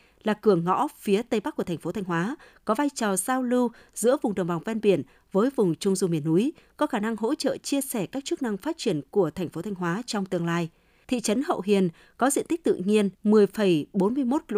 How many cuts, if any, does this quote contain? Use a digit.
2